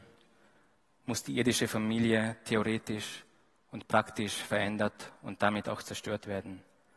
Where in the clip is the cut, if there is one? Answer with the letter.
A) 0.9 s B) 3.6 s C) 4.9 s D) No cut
D